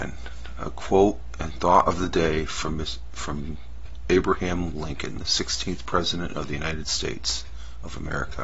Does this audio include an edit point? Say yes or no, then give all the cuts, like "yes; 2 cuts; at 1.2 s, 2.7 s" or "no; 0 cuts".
no; 0 cuts